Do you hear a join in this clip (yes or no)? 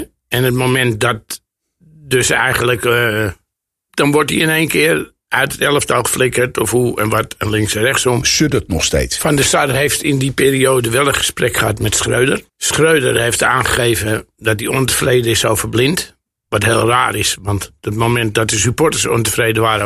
yes